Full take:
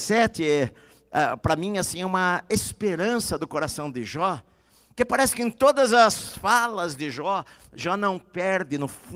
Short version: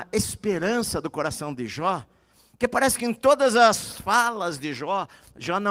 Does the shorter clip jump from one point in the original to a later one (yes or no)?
no